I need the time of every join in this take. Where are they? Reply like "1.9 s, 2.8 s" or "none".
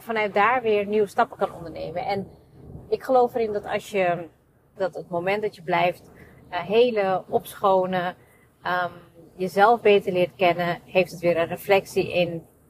4.8 s